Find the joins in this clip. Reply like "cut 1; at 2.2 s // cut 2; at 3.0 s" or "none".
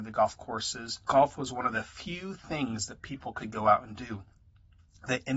cut 1; at 1.0 s // cut 2; at 3.4 s